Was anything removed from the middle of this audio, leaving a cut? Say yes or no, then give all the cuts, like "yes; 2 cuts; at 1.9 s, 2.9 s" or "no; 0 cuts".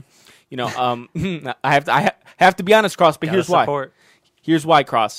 no; 0 cuts